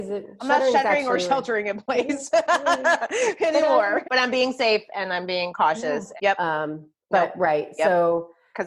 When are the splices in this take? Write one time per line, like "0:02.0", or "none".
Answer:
0:04.0
0:06.2